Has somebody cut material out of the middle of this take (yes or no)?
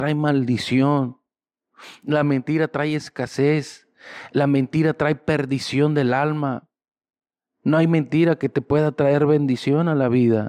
no